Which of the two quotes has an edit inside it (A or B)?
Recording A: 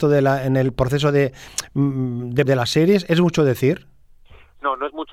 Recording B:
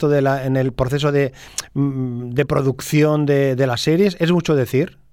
A